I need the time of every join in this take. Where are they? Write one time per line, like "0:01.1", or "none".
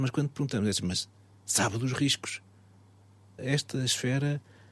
0:03.4